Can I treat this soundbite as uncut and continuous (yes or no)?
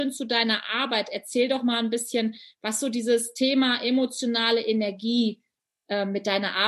yes